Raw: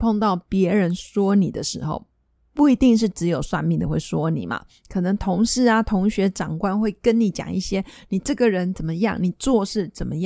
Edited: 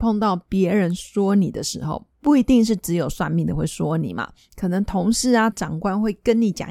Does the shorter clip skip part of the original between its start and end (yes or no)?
yes